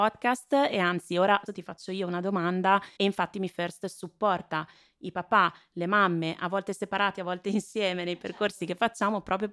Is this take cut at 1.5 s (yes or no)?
yes